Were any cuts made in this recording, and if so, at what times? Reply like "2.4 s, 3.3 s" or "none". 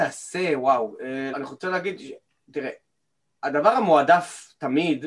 1.3 s